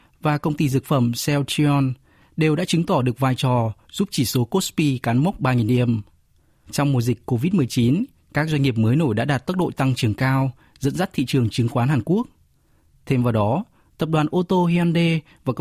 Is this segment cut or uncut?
uncut